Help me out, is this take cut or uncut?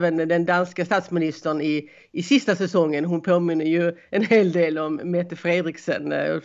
uncut